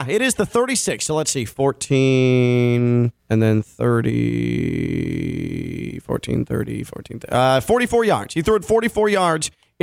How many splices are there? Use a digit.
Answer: 1